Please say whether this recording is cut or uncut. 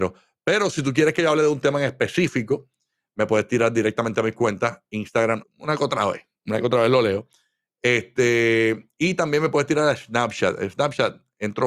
cut